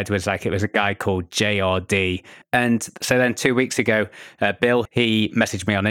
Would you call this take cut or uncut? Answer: cut